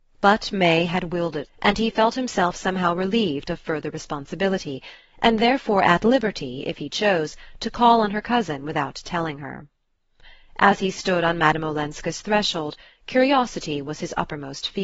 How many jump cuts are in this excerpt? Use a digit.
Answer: 1